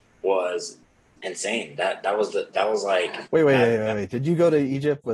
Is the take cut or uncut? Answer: uncut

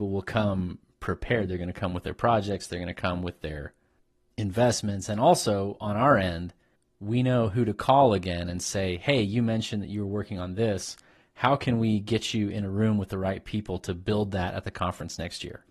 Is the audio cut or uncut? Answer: uncut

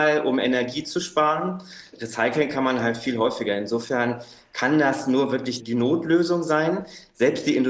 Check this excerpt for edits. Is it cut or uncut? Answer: uncut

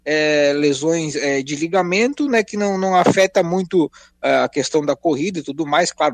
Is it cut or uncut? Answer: uncut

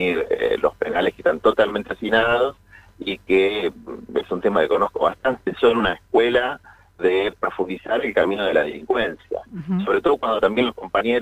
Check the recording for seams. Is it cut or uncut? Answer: uncut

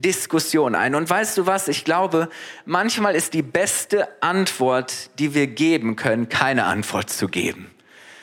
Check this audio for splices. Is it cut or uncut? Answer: uncut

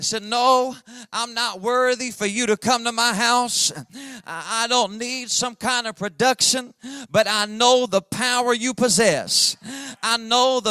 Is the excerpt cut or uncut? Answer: uncut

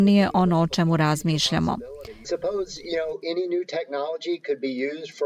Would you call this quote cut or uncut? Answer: cut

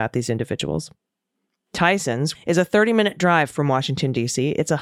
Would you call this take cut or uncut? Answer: cut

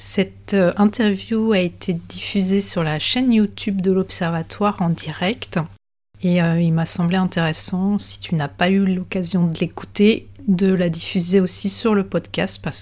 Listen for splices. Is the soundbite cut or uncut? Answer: uncut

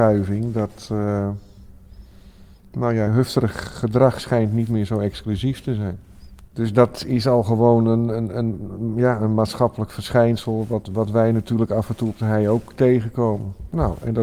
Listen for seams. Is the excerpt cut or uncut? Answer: cut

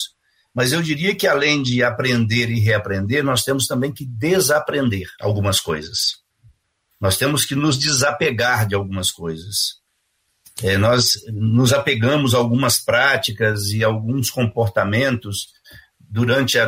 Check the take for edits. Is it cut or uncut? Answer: cut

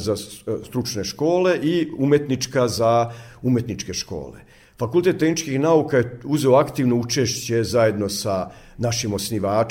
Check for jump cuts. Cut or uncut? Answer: uncut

